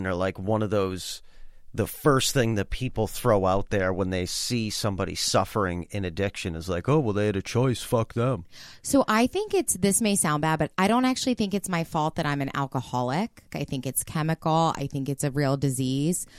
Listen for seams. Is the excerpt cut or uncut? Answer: cut